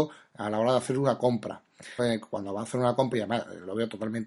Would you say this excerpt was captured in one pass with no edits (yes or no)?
no